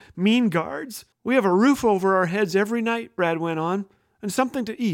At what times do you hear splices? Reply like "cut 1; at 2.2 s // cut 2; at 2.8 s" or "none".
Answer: cut 1; at 1.1 s